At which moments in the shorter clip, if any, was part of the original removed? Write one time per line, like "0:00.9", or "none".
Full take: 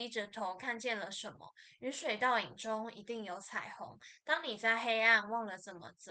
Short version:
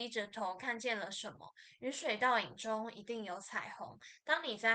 none